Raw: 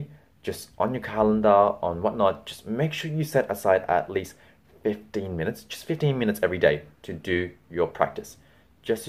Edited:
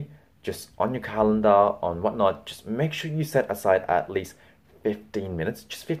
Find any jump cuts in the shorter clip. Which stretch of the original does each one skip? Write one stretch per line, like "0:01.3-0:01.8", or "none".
none